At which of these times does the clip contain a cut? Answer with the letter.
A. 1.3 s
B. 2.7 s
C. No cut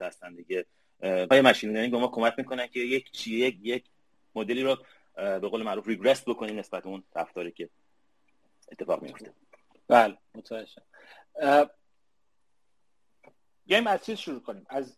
A